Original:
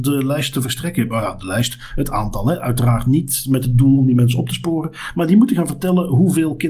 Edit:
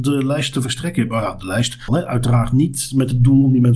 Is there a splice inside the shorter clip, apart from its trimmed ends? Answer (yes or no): yes